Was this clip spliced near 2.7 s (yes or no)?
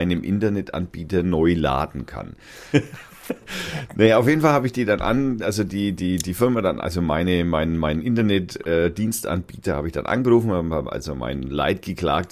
yes